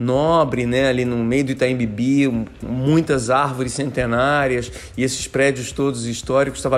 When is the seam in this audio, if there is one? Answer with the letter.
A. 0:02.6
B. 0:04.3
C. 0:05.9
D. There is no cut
A